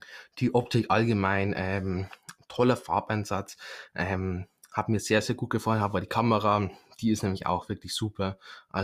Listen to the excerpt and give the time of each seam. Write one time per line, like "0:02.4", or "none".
0:03.9
0:05.2

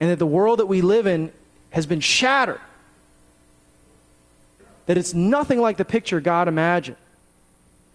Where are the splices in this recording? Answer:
none

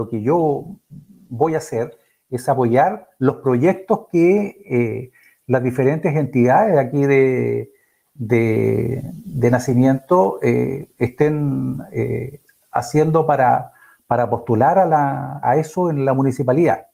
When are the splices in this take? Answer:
0:15.4

